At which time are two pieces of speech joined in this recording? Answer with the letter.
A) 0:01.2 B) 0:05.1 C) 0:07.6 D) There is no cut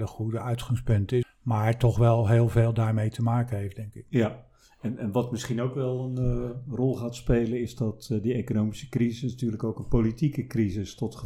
A